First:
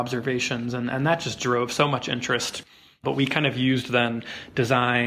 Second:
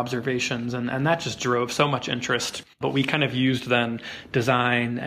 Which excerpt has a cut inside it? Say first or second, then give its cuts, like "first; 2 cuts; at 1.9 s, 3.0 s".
second; 1 cut; at 2.7 s